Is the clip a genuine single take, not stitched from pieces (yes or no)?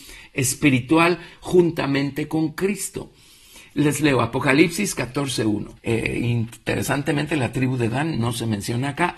no